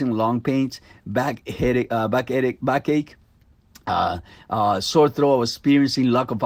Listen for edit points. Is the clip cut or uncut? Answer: uncut